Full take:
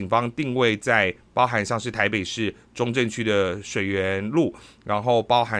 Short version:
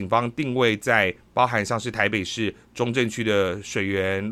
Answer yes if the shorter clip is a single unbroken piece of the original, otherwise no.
yes